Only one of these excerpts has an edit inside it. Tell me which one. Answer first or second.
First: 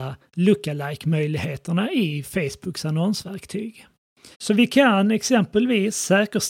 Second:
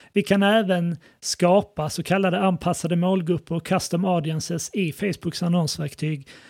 first